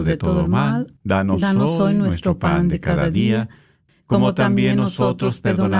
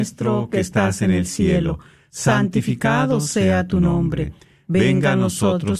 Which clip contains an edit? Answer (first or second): first